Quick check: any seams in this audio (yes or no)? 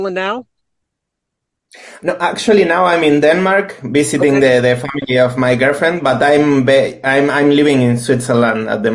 no